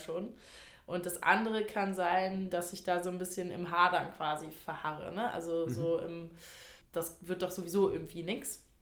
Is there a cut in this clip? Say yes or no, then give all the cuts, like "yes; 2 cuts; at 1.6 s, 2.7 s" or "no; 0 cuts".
yes; 2 cuts; at 2.5 s, 6.8 s